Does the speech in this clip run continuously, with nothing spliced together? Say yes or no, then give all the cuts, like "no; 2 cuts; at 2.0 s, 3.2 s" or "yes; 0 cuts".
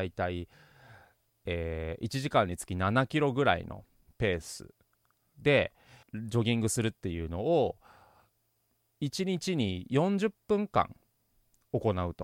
no; 1 cut; at 6.0 s